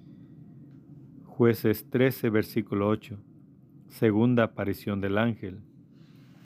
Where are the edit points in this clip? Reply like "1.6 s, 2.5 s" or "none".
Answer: none

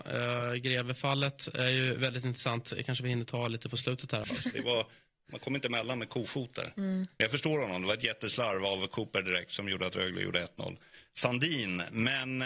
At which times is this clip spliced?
4.2 s

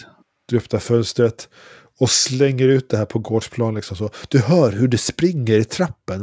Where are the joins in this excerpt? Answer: none

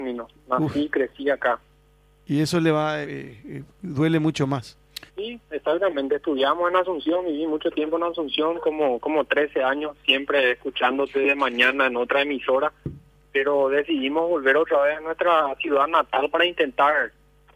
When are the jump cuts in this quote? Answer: 3.0 s, 5.1 s

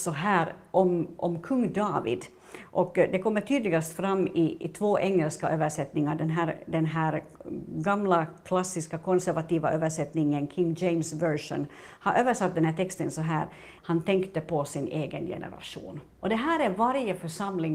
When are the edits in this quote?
13.8 s

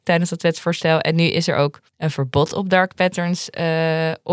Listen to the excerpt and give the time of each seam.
1.9 s

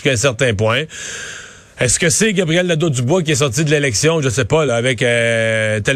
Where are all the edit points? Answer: none

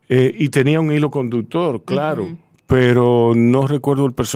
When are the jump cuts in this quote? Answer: none

